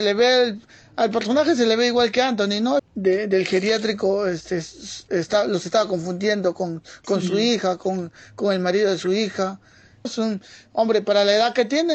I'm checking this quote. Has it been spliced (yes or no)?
yes